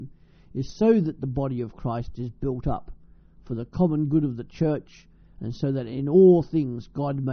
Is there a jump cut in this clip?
no; 0 cuts

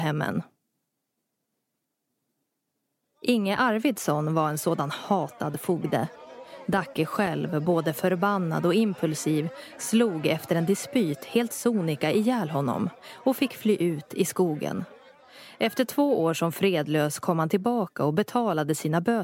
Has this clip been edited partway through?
no; 0 cuts

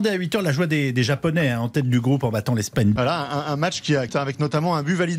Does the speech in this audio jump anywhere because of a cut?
yes; 2 cuts; at 3.0 s, 4.1 s

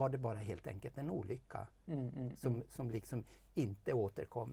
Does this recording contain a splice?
no; 0 cuts

